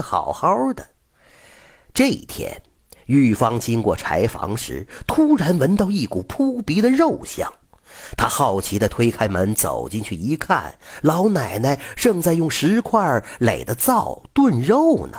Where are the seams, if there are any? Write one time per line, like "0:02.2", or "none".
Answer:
none

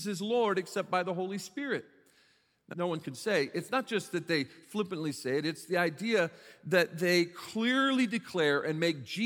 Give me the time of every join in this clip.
0:02.7

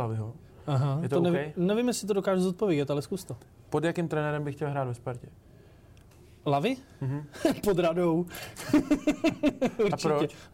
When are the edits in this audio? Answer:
none

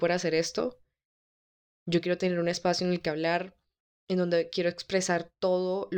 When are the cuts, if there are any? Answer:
0:01.8

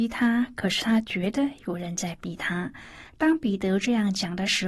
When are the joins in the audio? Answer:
0:03.1

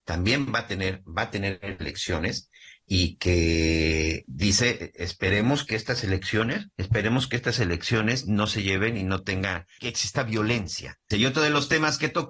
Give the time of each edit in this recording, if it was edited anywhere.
0:06.7
0:09.8
0:11.1

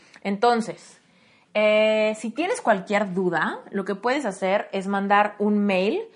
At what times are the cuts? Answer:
none

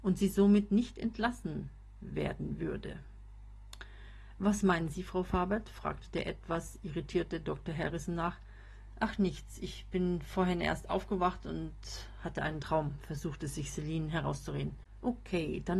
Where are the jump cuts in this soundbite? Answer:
none

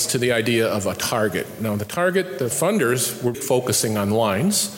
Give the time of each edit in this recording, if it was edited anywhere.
0:03.3

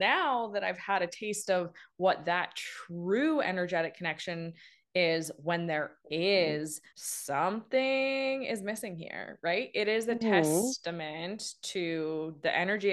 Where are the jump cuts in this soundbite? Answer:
0:06.9

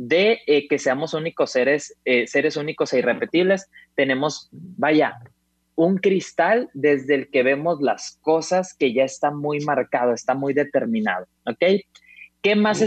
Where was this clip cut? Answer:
none

